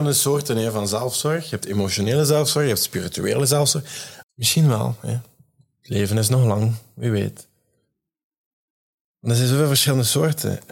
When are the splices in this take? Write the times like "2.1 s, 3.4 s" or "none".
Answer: 4.2 s